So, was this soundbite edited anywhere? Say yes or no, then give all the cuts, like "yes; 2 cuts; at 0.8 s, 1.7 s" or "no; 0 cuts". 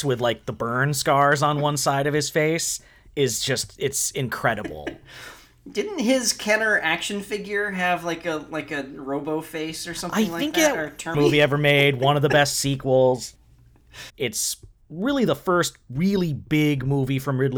yes; 2 cuts; at 11.1 s, 14.1 s